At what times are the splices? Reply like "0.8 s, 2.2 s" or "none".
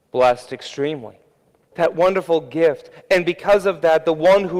1.7 s

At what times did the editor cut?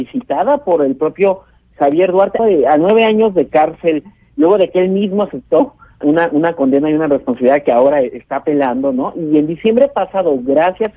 2.4 s, 6.0 s

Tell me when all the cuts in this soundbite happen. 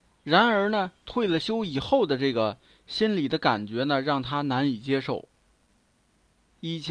none

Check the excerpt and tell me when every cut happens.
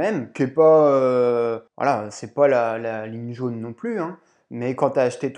1.7 s

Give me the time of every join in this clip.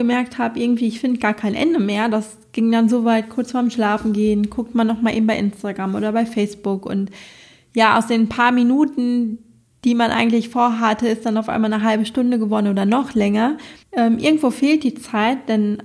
13.8 s

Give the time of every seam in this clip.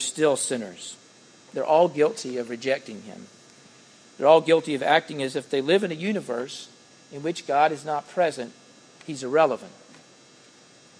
8.8 s

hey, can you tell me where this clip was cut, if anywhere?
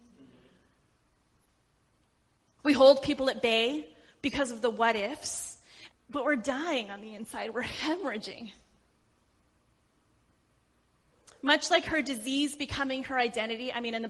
2.6 s, 5.9 s

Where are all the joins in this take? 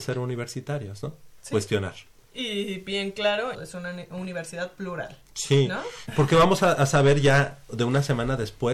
3.5 s, 6.1 s

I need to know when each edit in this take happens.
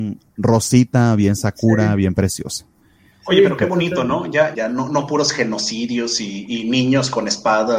4.5 s

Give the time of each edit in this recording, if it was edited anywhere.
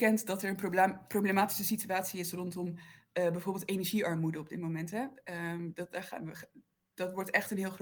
none

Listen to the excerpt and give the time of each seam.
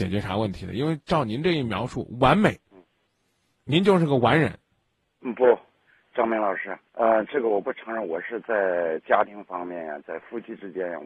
6.9 s

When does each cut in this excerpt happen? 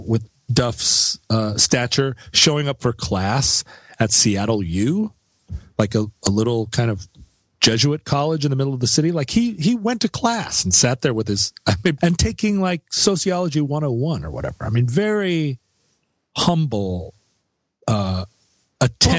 12.0 s

